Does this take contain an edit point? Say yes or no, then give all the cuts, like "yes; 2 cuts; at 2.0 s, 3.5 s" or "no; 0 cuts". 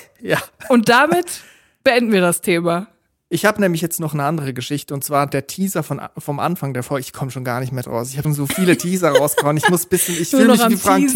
yes; 1 cut; at 8.2 s